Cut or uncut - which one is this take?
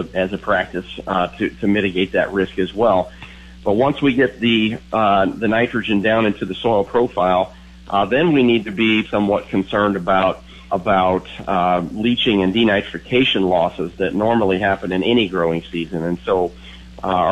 cut